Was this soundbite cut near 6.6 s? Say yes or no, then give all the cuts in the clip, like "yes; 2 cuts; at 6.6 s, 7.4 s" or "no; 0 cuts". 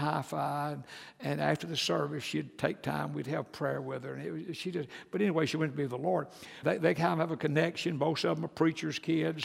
yes; 1 cut; at 6.6 s